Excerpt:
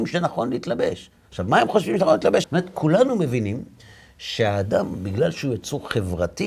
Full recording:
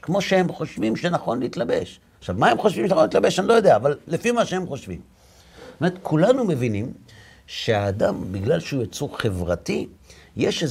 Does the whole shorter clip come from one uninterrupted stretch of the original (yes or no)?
no